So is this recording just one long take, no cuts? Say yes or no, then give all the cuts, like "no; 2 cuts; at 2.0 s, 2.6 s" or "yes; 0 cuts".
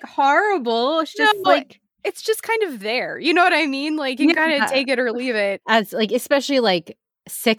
no; 1 cut; at 5.6 s